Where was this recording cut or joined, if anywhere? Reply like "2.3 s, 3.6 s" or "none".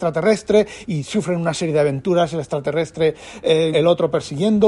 3.7 s